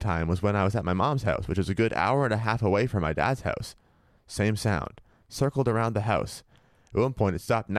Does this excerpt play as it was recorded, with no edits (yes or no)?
yes